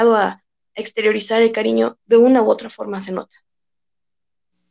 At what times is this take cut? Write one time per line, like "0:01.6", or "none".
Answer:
0:02.0